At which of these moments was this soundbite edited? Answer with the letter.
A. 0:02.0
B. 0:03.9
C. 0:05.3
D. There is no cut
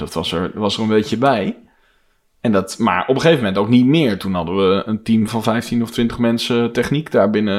C